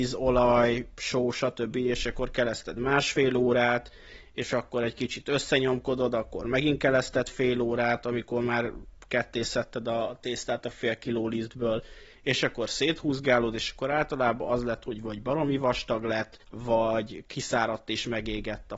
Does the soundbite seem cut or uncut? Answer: cut